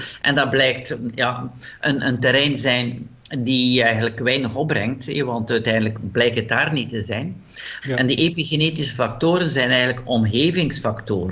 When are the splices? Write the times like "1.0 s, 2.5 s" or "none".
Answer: 7.8 s

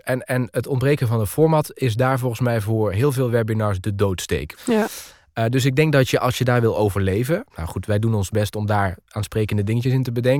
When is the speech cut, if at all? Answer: 4.6 s, 7.5 s

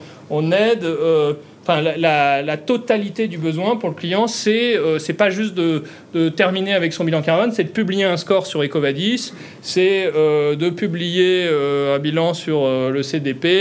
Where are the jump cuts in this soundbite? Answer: none

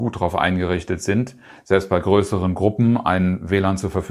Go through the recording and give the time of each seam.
none

